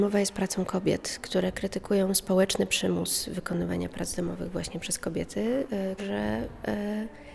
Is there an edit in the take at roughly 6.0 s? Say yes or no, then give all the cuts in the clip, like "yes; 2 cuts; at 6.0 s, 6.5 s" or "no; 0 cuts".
yes; 1 cut; at 6.0 s